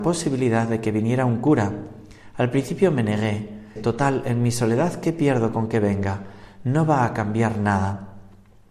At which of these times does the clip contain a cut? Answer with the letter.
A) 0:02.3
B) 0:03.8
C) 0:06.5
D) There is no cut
B